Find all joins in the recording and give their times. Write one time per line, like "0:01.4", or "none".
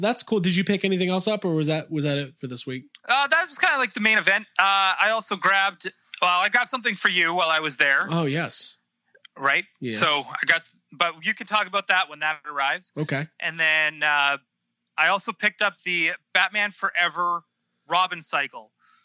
none